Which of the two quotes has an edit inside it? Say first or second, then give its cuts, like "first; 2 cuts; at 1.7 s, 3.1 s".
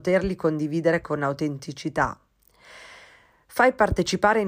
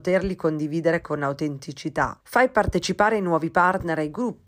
second; 1 cut; at 2.2 s